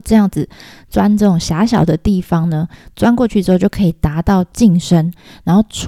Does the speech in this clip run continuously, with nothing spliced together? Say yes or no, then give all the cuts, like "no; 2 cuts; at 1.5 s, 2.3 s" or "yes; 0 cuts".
yes; 0 cuts